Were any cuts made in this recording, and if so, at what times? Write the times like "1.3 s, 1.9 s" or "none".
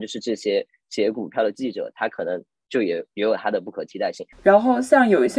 4.3 s